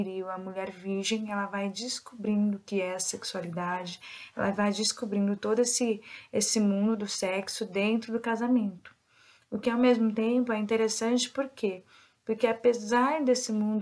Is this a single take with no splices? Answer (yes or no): yes